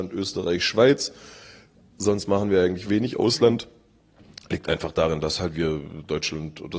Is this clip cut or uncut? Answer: uncut